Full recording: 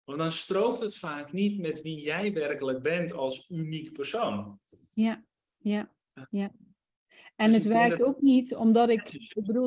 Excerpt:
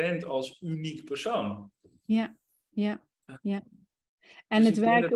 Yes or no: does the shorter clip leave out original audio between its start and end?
no